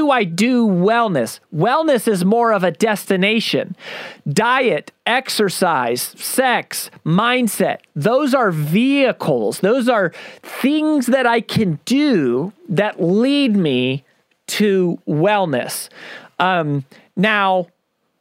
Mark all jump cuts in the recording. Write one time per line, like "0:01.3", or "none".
none